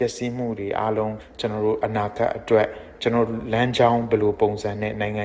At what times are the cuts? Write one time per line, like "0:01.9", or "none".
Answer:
0:01.2

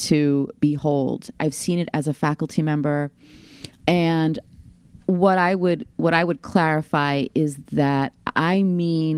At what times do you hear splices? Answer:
0:01.4
0:03.8

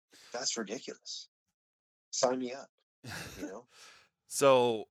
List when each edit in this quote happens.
none

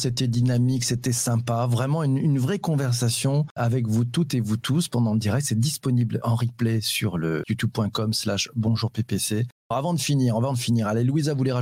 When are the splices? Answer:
0:06.2
0:07.4

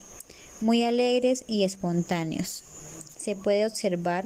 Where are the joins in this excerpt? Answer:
0:03.1

